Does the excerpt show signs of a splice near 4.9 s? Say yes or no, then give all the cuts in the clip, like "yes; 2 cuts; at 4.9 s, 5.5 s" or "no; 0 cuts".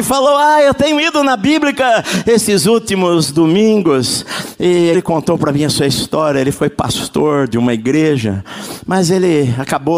yes; 1 cut; at 4.9 s